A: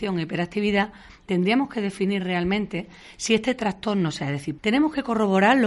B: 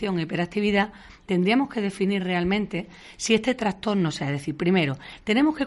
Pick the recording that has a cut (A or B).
A